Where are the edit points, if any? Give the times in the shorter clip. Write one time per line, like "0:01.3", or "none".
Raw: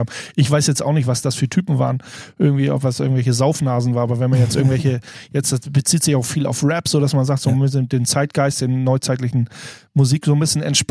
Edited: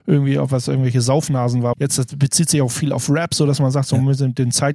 0:01.7